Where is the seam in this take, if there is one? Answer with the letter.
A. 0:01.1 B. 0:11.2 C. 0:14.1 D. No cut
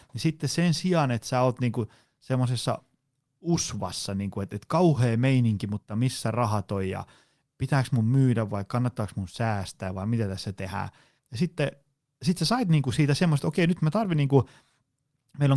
B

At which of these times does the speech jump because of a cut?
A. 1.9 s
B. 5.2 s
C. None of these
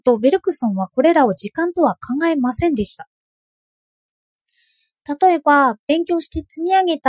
C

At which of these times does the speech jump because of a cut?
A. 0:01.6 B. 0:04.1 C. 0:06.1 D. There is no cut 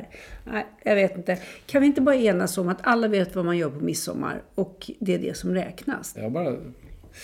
C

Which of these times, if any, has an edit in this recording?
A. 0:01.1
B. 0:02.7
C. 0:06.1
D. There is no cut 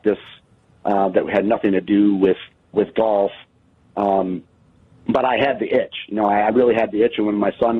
B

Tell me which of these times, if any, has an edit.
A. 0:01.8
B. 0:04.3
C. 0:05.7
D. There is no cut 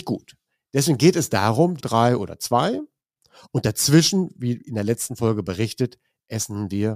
A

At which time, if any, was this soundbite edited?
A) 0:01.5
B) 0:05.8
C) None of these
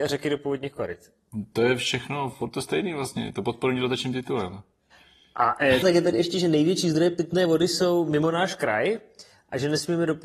B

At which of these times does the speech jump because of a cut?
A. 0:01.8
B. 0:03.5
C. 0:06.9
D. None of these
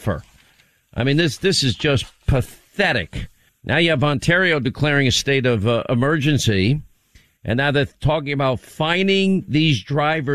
B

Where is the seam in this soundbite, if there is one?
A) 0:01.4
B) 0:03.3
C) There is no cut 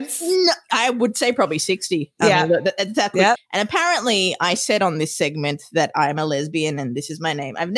B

